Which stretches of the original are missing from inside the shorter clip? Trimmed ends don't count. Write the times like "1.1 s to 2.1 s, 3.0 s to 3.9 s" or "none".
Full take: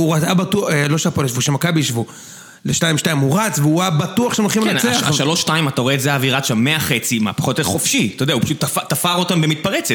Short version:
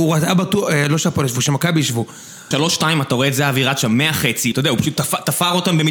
2.5 s to 5.2 s, 7.2 s to 8.2 s